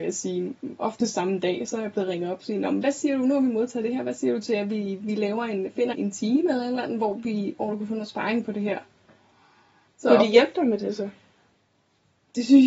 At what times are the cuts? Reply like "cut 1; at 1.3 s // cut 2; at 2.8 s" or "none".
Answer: cut 1; at 5.9 s // cut 2; at 9.9 s